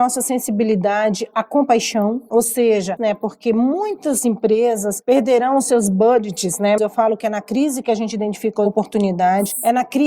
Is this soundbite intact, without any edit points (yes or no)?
no